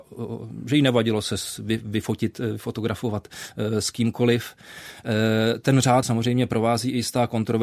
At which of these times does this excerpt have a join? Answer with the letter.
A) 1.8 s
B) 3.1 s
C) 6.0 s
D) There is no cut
C